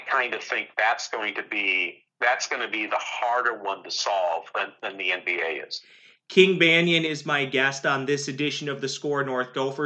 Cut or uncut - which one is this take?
uncut